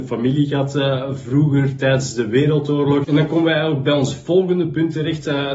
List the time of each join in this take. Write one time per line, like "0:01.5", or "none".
0:03.0